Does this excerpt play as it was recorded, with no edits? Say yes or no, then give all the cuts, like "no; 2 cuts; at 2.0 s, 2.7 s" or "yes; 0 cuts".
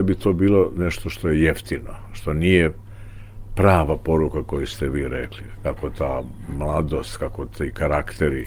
no; 1 cut; at 5.6 s